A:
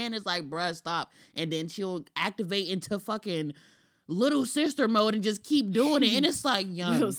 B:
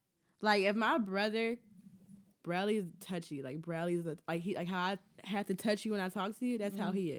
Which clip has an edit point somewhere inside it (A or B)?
B